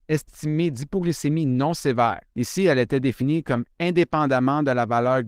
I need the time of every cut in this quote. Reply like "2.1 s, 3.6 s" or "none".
2.3 s